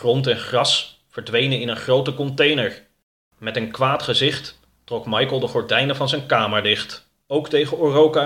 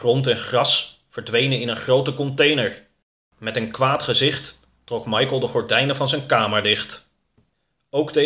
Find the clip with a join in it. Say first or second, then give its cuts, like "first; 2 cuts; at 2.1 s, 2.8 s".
first; 1 cut; at 7.2 s